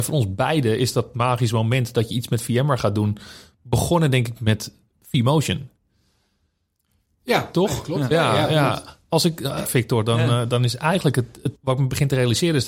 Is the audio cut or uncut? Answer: cut